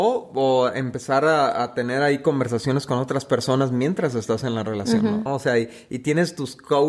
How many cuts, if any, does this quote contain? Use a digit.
1